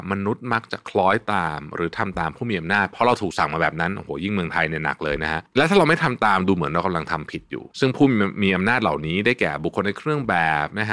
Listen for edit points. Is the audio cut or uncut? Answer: cut